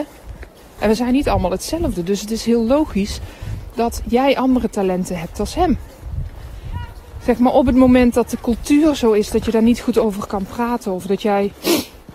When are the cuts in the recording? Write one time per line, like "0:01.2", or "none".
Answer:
none